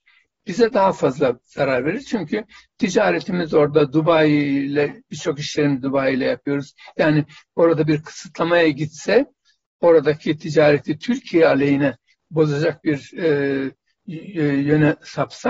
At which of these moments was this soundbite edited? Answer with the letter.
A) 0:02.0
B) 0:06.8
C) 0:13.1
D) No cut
D